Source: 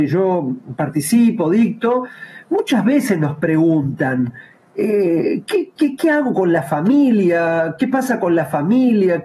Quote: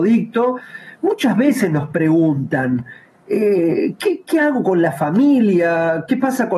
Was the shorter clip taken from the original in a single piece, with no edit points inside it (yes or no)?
no